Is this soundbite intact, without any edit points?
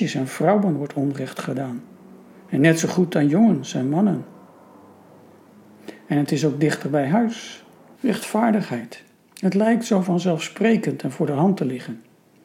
no; 1 cut; at 7.9 s

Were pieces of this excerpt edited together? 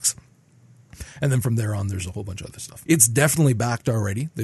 yes; 1 cut; at 2.9 s

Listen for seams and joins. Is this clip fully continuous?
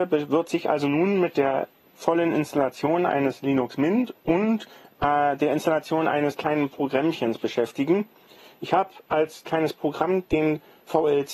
yes; 0 cuts

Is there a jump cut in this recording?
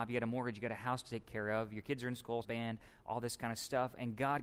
yes; 1 cut; at 2.4 s

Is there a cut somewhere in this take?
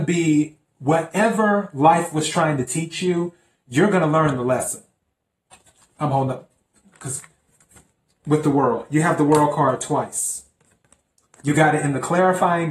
no; 0 cuts

